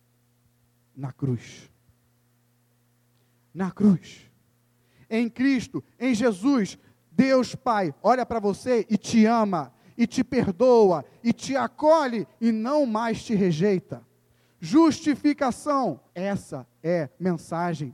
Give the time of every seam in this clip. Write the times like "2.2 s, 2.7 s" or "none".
16.1 s